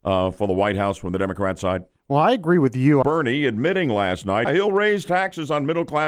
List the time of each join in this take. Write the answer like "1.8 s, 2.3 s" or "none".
3.0 s, 4.5 s